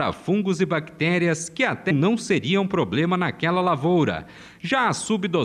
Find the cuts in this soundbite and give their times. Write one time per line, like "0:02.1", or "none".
0:01.9